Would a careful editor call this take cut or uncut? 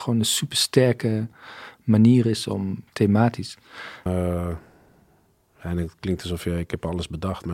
cut